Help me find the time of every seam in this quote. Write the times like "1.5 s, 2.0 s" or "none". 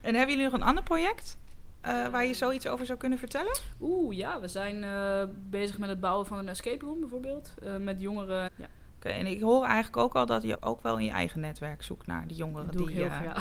8.5 s, 10.5 s